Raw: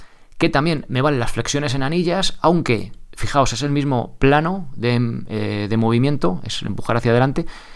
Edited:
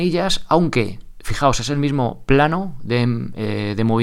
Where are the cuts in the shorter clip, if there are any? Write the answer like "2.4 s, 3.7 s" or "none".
none

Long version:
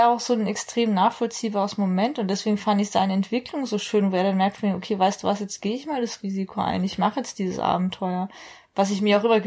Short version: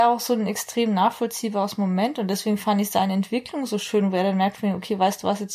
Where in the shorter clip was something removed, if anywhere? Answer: none

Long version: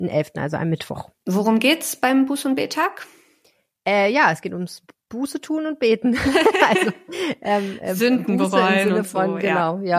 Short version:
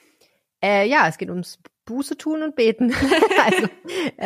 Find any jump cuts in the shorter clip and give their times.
none

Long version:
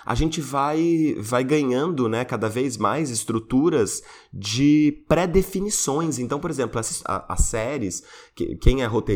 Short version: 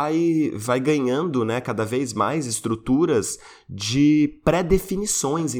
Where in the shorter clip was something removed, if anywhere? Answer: none

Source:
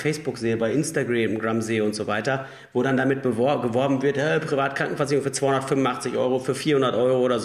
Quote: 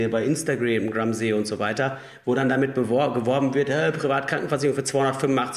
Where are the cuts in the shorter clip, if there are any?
none

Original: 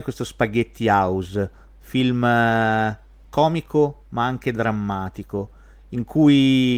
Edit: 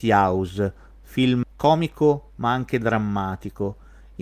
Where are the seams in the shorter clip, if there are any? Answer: 1.4 s

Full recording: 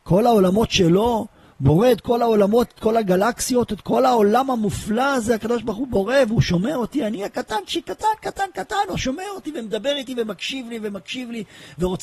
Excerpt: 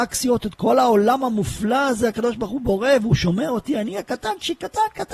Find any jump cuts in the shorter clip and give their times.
none

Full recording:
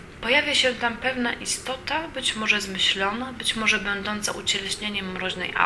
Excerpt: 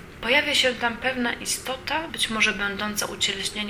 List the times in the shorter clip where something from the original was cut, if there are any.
2.1 s

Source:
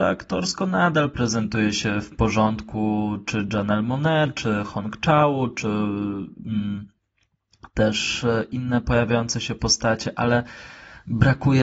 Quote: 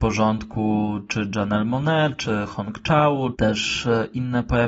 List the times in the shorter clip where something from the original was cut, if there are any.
3.3 s

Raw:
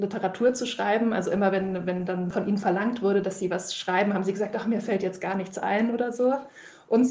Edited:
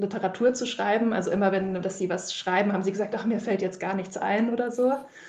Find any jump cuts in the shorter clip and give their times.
1.8 s

